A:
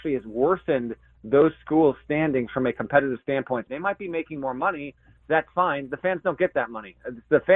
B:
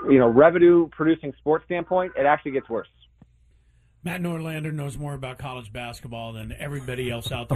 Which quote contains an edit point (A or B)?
A